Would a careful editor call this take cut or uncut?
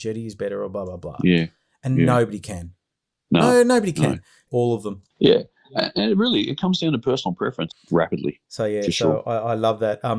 cut